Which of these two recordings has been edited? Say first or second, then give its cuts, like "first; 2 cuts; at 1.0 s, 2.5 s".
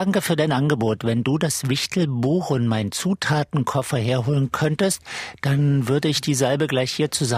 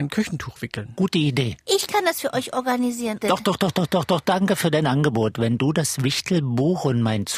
second; 1 cut; at 3.2 s